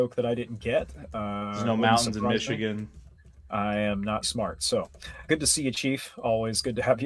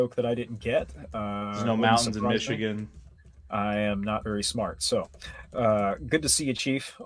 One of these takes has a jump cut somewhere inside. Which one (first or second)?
first